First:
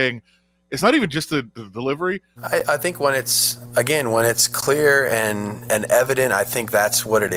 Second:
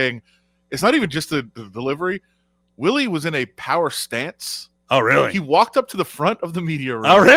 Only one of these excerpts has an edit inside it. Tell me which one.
first; 2 cuts; at 2.4 s, 5.7 s

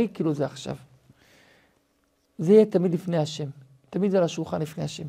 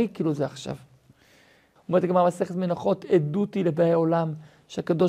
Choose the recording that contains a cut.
second; 1 cut; at 1.8 s

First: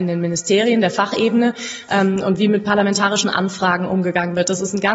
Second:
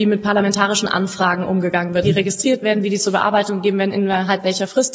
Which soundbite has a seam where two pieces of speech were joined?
second; 1 cut; at 2.0 s

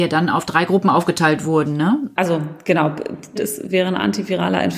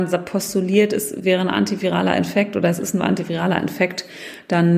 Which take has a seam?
first; 2 cuts; at 2.2 s, 3.4 s

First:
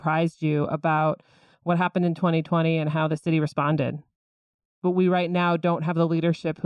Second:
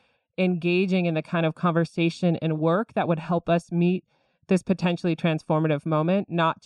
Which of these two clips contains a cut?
first; 1 cut; at 4.7 s

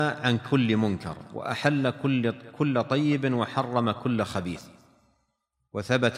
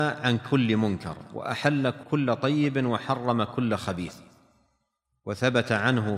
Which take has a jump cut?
second; 1 cut; at 2.0 s

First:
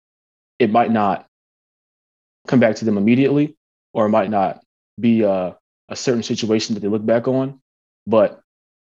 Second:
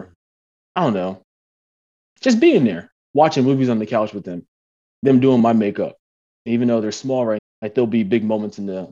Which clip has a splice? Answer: second; 2 cuts; at 6.4 s, 7.4 s

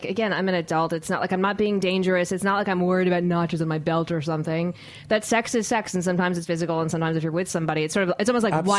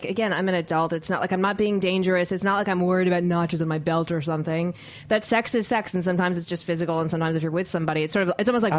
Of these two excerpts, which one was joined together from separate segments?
first; 1 cut; at 6.5 s

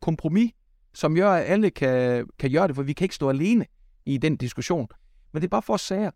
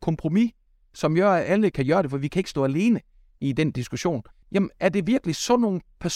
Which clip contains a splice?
second; 2 cuts; at 1.7 s, 4.4 s

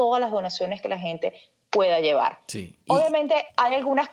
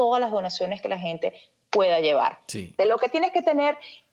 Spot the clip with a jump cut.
second; 1 cut; at 2.8 s

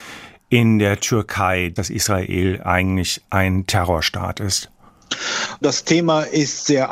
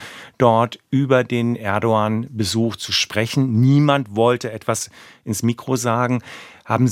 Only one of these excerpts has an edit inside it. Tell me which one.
first; 2 cuts; at 1.8 s, 5.6 s

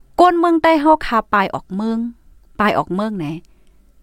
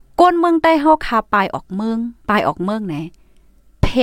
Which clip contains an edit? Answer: second; 1 cut; at 2.2 s

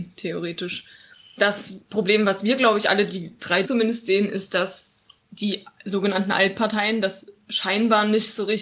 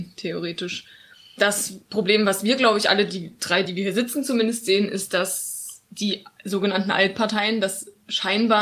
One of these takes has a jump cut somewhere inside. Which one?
first; 1 cut; at 3.6 s

